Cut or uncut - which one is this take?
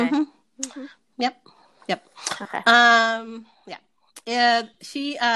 uncut